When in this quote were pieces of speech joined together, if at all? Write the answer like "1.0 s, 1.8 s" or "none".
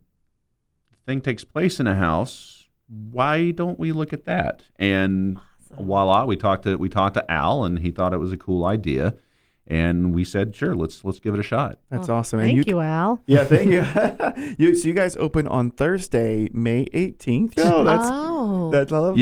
11.8 s, 17.6 s